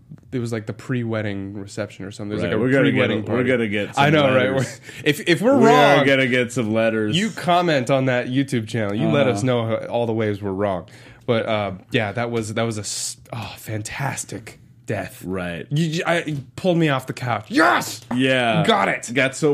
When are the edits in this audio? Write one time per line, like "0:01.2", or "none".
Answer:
0:18.1